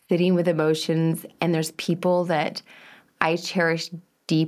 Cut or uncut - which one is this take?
uncut